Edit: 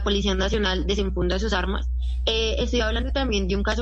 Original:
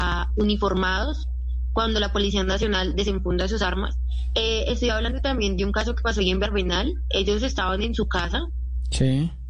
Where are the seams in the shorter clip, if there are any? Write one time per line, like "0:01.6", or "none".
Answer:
none